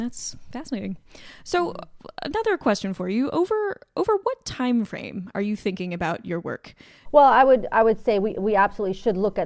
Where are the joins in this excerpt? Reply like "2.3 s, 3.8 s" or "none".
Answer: 7.1 s